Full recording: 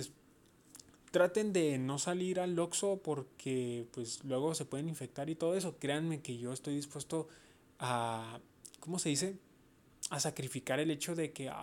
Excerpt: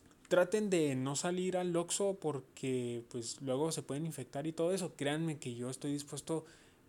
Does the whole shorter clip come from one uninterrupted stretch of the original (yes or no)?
yes